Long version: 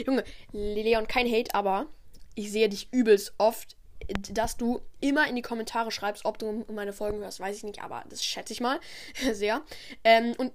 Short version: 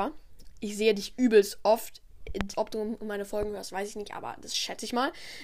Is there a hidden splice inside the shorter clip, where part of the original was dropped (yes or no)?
yes